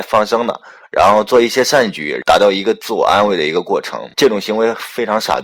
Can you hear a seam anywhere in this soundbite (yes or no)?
no